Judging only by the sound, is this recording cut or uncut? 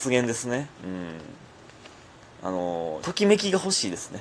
cut